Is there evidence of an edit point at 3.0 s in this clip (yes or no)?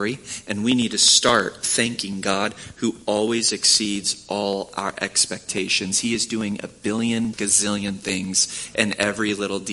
no